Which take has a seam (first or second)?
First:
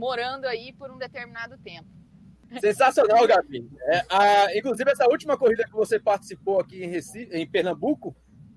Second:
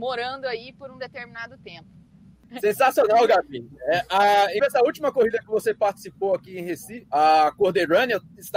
second